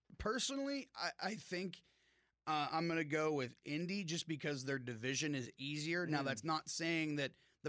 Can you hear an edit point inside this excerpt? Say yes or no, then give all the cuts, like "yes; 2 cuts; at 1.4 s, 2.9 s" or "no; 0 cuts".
no; 0 cuts